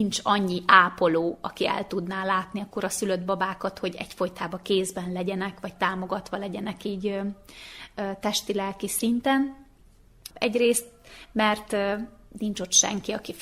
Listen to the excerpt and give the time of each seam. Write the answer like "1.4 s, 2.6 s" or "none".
10.3 s